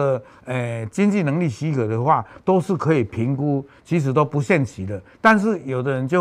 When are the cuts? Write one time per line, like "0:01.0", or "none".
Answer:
none

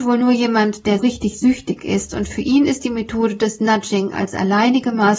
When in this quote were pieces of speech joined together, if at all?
0:01.0

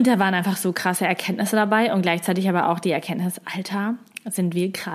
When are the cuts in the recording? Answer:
none

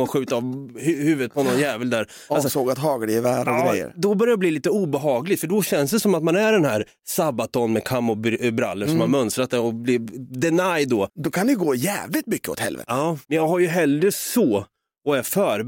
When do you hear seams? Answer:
0:11.1
0:13.2

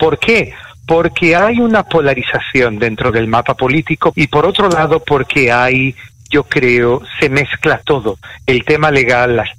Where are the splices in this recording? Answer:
0:04.1

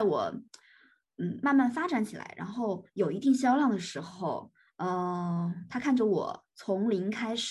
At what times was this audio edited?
none

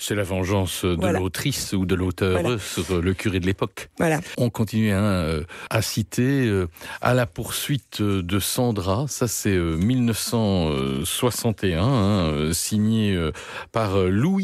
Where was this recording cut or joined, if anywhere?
none

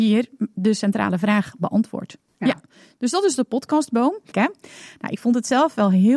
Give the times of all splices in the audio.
0:02.3
0:04.3

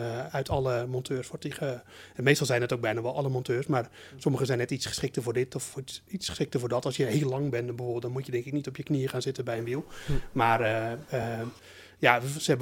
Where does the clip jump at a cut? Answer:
none

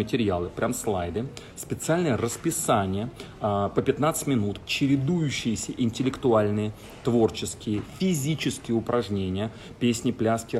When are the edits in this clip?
0:04.6

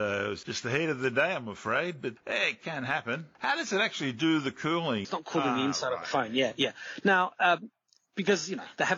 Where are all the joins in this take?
0:05.0

